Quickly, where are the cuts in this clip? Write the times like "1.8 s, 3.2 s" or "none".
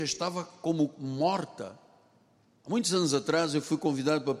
none